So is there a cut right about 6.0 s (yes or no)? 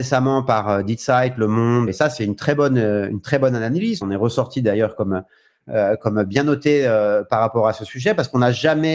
no